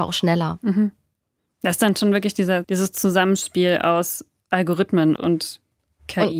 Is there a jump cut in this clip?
yes; 2 cuts; at 2.6 s, 5.2 s

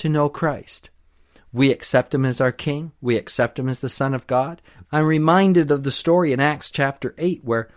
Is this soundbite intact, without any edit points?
no; 1 cut; at 4.8 s

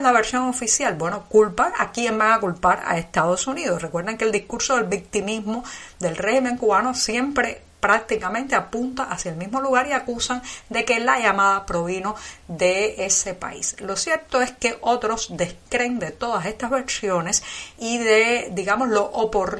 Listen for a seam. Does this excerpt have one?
no; 0 cuts

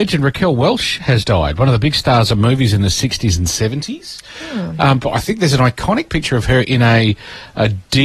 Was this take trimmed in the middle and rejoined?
yes; 1 cut; at 5.0 s

